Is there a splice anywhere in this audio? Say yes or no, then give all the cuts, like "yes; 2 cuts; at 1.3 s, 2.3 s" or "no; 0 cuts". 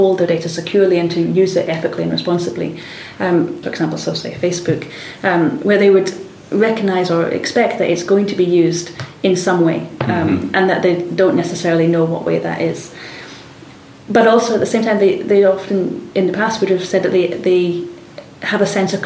yes; 1 cut; at 3.6 s